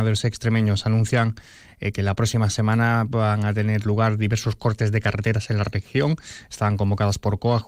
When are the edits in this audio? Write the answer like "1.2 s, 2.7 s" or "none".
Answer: none